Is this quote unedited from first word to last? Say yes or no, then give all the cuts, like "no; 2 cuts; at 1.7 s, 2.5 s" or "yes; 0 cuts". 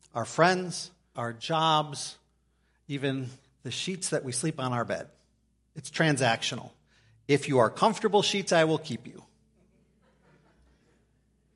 no; 1 cut; at 1.1 s